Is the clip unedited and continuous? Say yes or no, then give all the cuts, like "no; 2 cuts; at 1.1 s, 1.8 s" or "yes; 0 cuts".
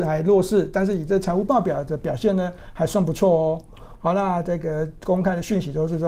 no; 1 cut; at 3.9 s